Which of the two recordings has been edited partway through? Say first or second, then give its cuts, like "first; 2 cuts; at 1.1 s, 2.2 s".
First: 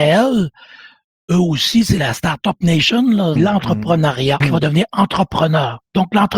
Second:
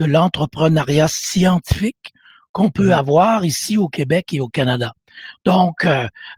first; 2 cuts; at 3.4 s, 4.4 s